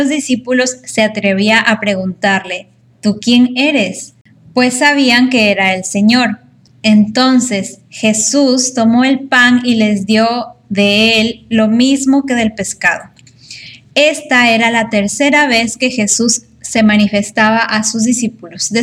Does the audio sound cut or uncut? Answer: uncut